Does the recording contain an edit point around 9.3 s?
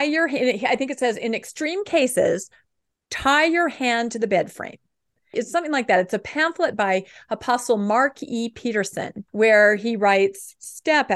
yes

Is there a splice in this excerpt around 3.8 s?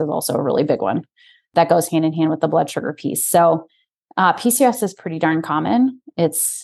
no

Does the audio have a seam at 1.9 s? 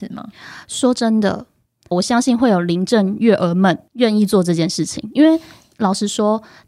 yes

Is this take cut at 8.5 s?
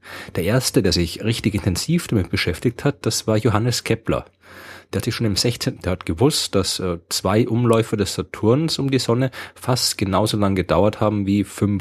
no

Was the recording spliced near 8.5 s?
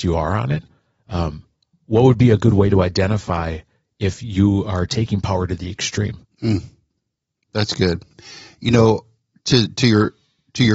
no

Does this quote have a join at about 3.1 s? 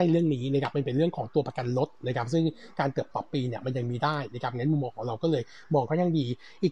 yes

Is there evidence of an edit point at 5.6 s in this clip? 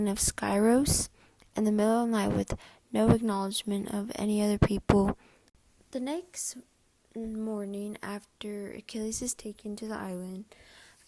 no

